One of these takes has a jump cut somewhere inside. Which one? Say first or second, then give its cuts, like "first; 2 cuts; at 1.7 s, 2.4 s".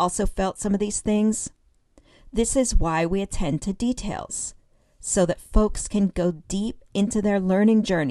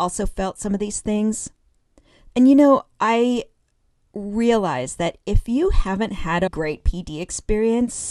second; 2 cuts; at 2.3 s, 6.5 s